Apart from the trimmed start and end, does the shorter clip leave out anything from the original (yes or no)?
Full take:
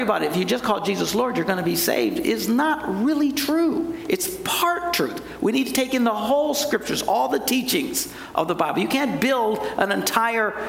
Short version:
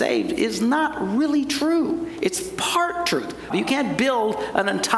yes